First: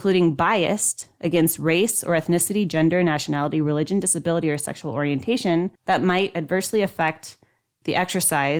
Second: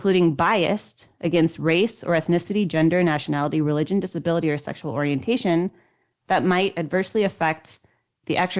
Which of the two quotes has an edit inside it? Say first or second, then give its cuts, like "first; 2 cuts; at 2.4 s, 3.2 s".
first; 1 cut; at 5.8 s